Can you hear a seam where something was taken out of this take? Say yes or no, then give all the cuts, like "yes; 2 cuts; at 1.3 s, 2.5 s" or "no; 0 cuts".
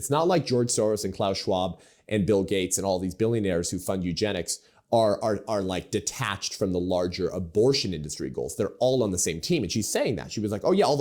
no; 0 cuts